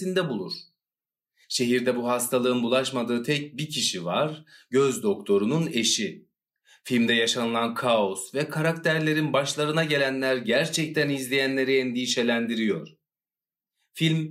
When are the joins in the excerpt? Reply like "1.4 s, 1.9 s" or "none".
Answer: 1.4 s

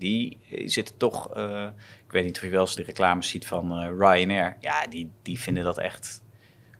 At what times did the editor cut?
2.8 s

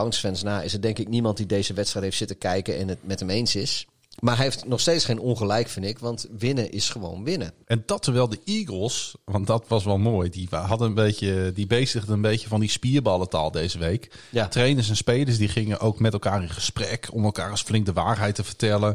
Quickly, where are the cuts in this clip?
7.6 s

